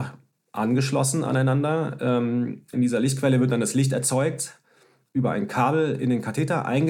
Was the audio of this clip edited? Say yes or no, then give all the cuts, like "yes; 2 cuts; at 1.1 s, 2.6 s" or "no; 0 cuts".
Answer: yes; 1 cut; at 2.7 s